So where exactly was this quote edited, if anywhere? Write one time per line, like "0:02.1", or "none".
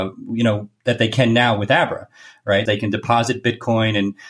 0:02.7